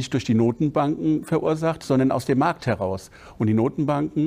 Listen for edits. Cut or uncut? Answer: uncut